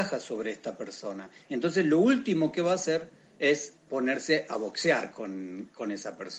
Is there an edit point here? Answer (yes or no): no